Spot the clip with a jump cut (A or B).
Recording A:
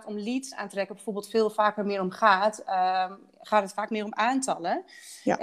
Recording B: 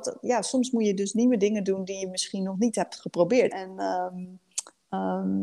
B